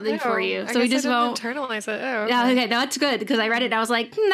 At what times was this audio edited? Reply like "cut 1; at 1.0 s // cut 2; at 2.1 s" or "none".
none